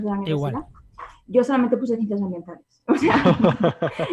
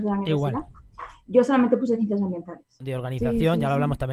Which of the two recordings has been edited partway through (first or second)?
second